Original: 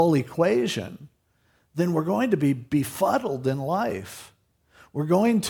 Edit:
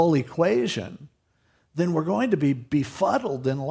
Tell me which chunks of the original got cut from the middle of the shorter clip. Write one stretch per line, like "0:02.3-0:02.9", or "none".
none